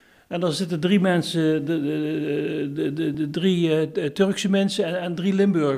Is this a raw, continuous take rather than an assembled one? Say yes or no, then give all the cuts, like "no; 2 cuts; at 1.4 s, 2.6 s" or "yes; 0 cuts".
yes; 0 cuts